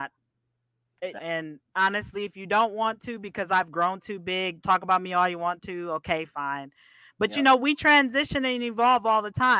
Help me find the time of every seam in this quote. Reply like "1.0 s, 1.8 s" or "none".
1.2 s, 4.6 s